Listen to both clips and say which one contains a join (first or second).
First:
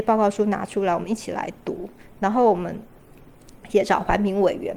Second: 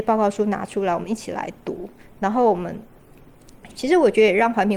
second